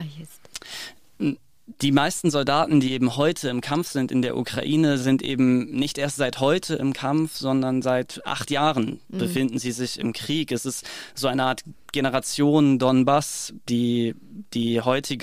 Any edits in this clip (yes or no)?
no